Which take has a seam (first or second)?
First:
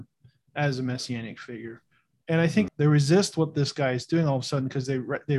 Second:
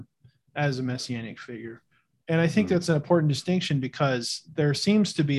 first